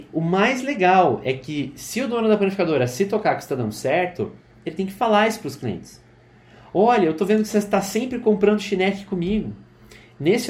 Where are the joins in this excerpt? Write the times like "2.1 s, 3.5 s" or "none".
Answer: none